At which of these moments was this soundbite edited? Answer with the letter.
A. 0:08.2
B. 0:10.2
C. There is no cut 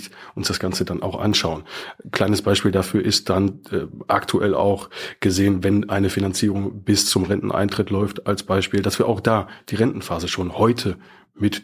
C